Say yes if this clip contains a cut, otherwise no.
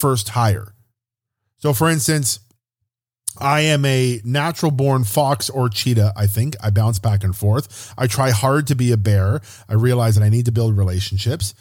no